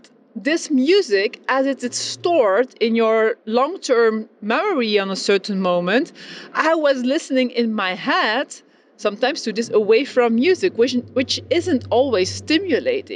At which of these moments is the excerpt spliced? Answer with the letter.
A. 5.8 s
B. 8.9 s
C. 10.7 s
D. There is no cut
D